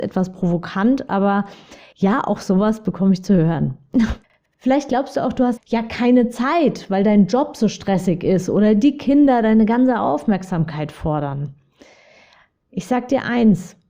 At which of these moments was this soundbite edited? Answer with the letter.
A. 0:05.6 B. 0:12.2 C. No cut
A